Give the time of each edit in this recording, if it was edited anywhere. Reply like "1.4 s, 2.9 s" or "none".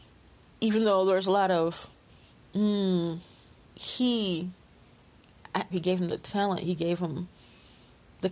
3.7 s, 5.7 s